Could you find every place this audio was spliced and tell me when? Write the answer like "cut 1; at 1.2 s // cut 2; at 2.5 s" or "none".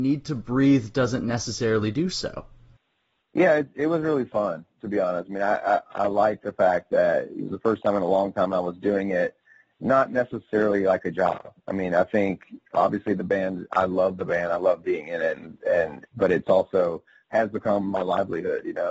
none